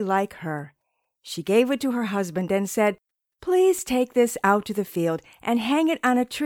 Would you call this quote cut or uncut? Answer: uncut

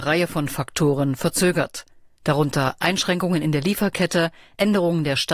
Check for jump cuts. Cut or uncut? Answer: uncut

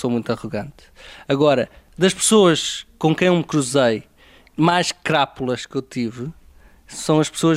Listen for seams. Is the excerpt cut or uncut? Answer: uncut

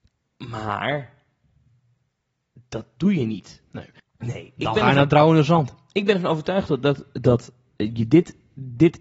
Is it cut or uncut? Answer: cut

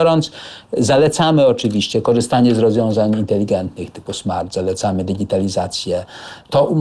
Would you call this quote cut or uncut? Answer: uncut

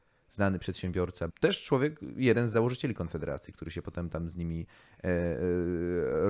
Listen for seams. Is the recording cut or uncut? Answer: cut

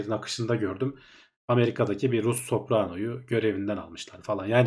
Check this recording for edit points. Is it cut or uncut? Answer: uncut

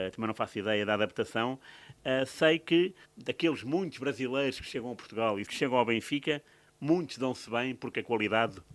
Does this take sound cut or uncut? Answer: cut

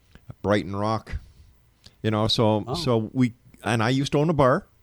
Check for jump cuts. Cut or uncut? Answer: uncut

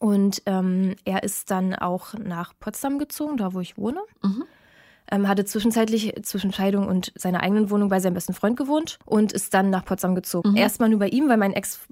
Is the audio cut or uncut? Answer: cut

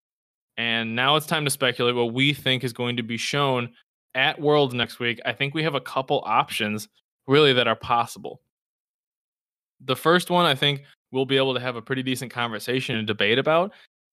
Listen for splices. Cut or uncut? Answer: uncut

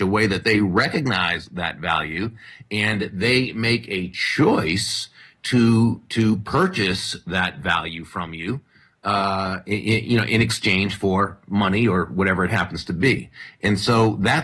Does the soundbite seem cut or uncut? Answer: uncut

